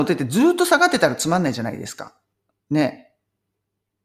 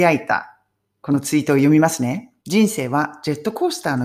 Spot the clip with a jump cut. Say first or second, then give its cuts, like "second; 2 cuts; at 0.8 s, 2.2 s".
second; 1 cut; at 2.4 s